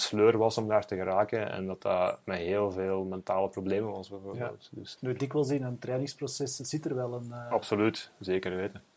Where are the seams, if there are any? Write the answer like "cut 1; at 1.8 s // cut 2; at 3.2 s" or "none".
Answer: cut 1; at 5.0 s